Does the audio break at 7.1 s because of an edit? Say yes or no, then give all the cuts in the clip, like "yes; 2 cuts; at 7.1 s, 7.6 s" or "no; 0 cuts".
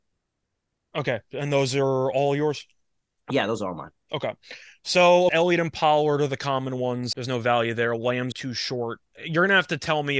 yes; 3 cuts; at 5.3 s, 7.1 s, 8.3 s